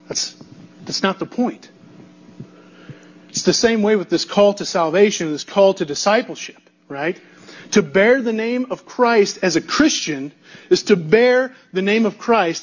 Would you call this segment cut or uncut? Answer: uncut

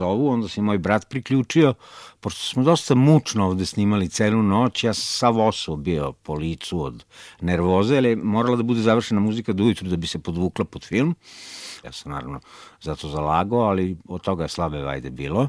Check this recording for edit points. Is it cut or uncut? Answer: cut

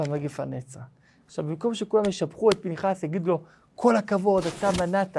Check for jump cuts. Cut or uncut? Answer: cut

